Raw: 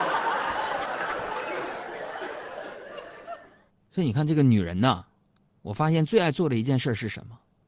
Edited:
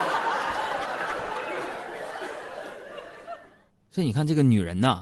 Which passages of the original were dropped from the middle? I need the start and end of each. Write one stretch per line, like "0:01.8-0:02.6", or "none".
none